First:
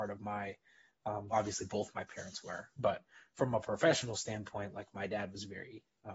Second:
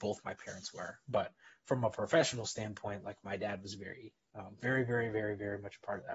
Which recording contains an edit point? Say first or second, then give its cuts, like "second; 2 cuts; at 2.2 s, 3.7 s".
first; 1 cut; at 1.3 s